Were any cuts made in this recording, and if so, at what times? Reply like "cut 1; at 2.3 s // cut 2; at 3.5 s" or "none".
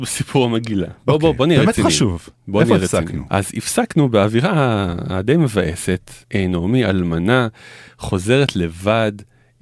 cut 1; at 3.3 s // cut 2; at 6.2 s